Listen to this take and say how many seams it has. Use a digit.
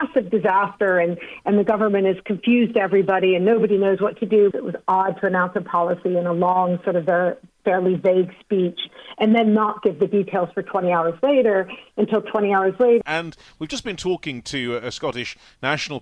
2